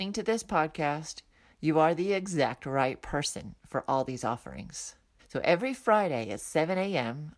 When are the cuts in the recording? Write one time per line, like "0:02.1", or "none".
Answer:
0:05.2